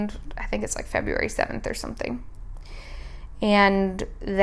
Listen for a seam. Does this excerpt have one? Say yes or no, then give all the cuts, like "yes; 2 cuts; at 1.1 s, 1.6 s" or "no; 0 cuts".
no; 0 cuts